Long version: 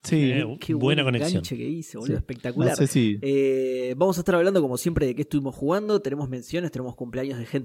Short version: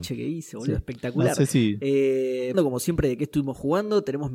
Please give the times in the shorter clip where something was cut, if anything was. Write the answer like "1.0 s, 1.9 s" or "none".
2.5 s